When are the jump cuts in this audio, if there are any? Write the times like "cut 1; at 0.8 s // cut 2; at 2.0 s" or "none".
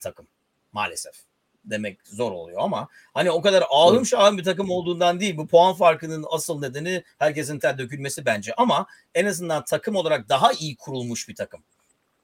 cut 1; at 7.6 s

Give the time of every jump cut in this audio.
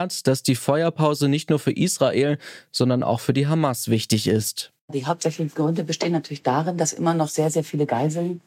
cut 1; at 4.8 s

